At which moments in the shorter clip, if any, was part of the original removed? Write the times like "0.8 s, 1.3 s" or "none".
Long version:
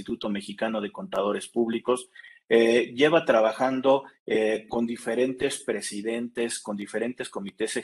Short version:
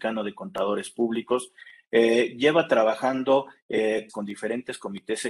4.1 s